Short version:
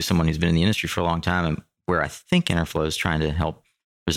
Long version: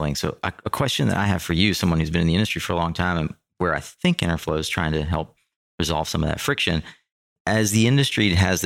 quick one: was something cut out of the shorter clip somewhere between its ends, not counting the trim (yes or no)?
no